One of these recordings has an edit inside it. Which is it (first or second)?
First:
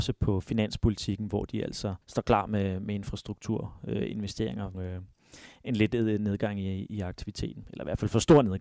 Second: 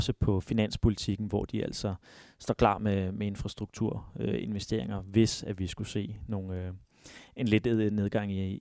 first